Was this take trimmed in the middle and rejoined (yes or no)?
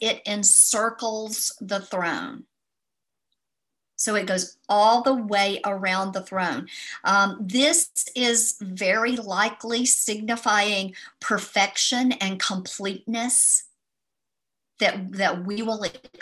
no